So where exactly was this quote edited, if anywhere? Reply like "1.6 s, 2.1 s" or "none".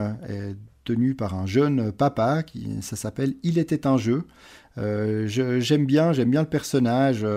none